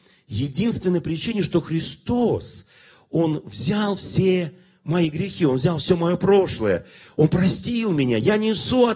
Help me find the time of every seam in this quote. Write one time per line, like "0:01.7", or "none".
none